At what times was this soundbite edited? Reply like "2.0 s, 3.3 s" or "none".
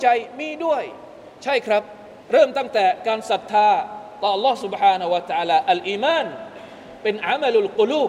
2.2 s